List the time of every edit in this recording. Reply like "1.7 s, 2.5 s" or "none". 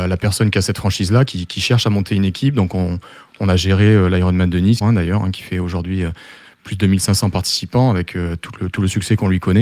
4.8 s